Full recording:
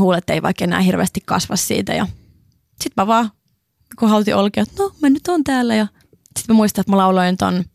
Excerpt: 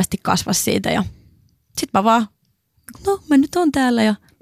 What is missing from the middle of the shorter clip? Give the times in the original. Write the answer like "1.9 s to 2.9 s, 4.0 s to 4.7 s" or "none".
4.0 s to 4.7 s